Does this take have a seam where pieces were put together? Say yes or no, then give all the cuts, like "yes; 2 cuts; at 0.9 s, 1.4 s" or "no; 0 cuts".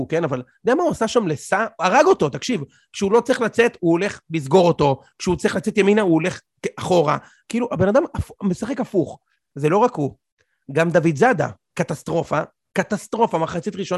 no; 0 cuts